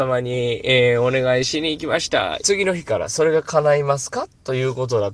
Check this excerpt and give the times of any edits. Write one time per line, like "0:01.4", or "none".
0:02.4

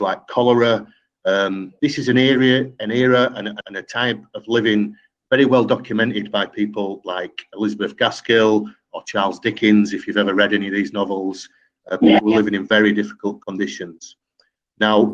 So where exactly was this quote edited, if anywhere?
0:03.6

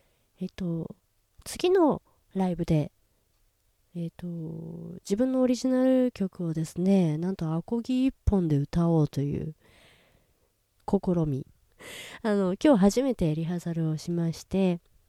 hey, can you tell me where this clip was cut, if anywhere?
0:11.4

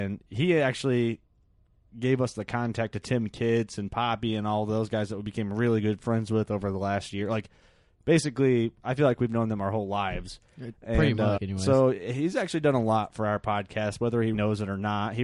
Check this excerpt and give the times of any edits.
0:11.4
0:14.3

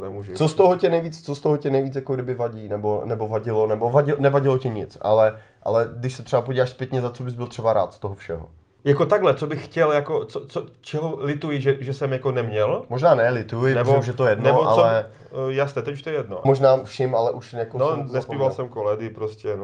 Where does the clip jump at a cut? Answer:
0:16.4

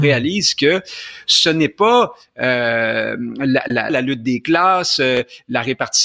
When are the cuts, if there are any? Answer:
0:03.9

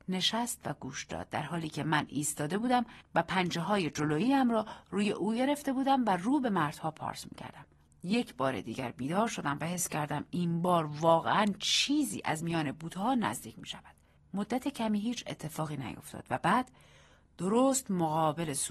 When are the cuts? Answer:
0:07.9
0:14.2

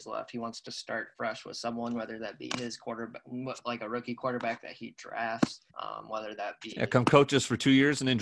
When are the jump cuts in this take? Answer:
0:05.7

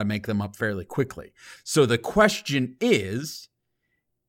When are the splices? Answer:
0:01.6

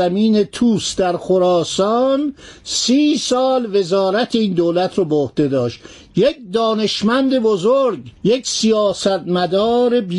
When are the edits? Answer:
0:08.2

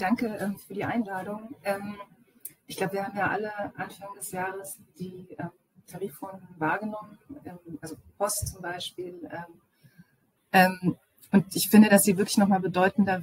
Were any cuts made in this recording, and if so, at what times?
0:10.4

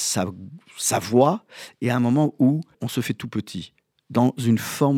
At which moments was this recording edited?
0:02.7

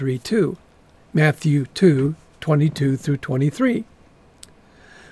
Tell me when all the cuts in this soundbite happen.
0:01.0

